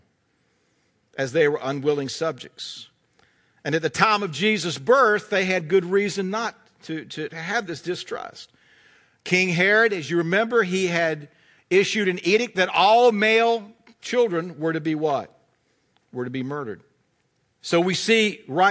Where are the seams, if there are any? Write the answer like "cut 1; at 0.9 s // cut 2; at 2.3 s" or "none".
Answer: cut 1; at 17.5 s